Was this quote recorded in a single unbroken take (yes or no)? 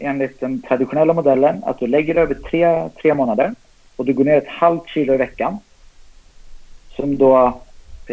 yes